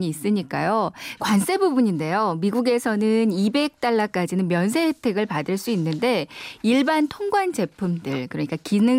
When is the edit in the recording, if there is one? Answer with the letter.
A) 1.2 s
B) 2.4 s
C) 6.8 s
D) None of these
A